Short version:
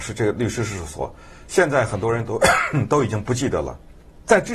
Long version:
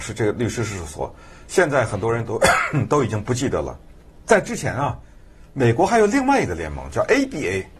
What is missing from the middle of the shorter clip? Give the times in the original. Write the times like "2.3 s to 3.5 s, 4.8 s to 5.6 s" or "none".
none